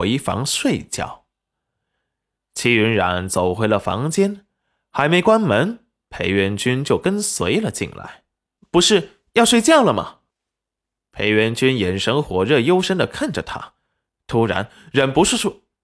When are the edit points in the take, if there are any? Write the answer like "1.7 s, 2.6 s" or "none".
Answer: 8.6 s, 10.3 s